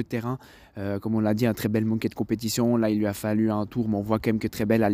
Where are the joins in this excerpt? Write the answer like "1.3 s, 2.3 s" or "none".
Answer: none